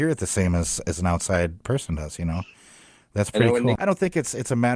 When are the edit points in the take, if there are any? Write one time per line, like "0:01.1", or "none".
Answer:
0:03.8